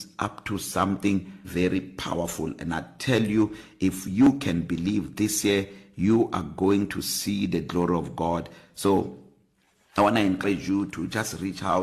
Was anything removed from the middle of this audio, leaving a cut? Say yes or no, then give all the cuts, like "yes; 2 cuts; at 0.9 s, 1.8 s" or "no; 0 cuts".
yes; 1 cut; at 1.4 s